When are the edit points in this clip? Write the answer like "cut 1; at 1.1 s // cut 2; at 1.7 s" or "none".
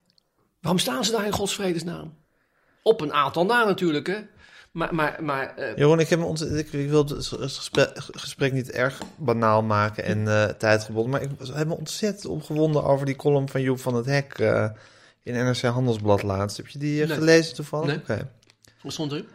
none